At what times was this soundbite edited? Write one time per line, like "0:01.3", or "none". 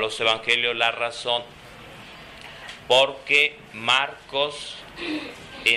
none

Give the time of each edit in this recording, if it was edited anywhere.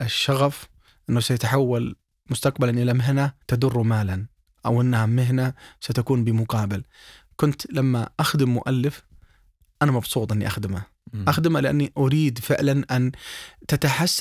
0:03.4

